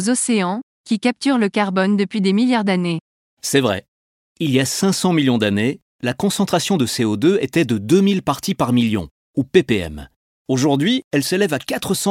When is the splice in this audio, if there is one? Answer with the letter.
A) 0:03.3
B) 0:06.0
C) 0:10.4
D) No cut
D